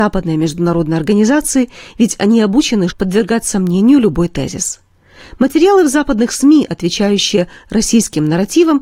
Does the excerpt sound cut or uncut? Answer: cut